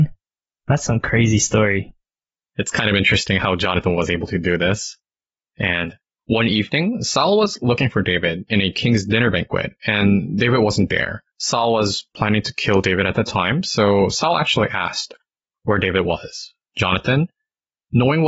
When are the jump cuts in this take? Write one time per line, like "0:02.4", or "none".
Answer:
0:11.3
0:16.6